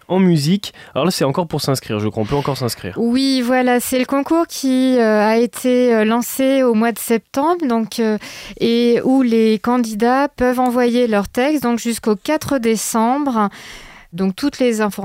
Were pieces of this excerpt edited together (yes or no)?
yes